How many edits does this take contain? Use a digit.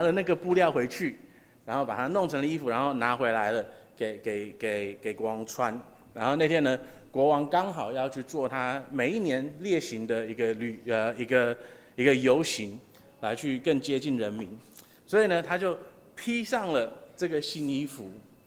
0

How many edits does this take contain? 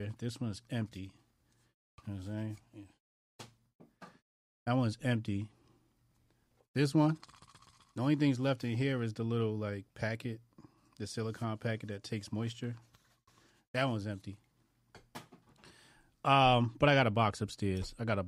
0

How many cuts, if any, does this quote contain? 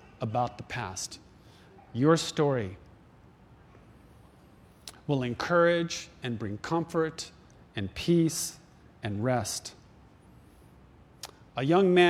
1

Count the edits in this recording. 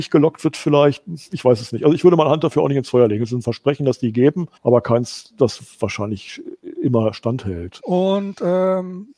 2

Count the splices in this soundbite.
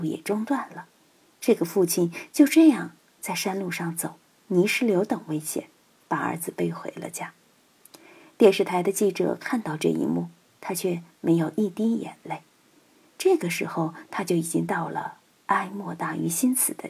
2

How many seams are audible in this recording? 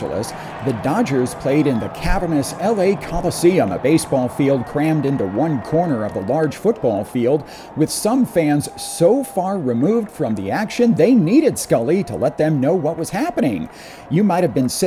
0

